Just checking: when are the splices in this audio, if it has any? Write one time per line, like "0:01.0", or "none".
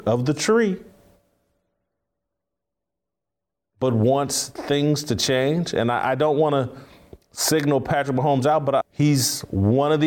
0:08.8